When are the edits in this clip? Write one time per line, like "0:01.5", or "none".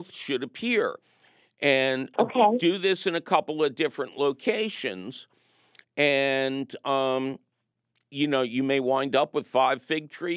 none